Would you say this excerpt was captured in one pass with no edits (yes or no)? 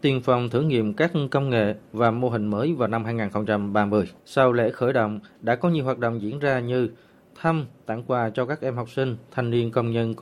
no